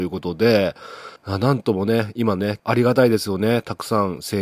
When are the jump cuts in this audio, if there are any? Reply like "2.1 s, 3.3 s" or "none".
1.2 s, 2.6 s